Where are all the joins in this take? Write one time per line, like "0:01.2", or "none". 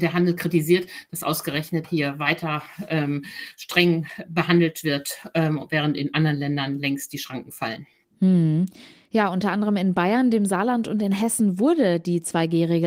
0:01.8